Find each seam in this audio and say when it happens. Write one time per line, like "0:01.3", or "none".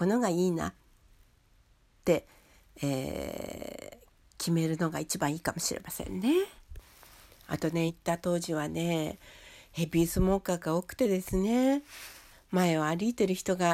0:07.9
0:12.3